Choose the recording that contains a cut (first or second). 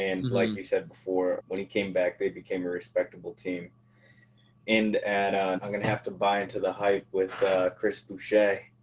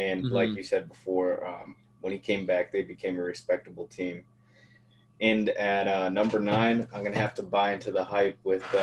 first